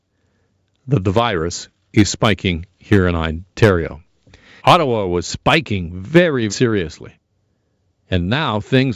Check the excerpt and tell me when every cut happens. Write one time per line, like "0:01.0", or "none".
0:04.6
0:06.5